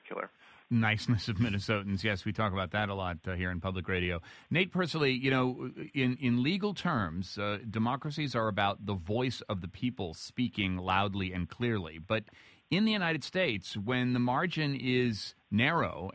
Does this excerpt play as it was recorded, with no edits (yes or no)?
yes